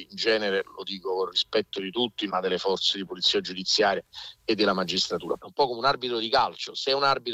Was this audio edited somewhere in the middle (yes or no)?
yes